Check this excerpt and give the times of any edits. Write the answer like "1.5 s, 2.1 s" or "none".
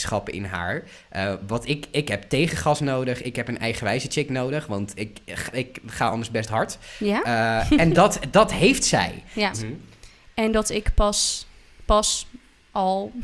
7.9 s, 9.5 s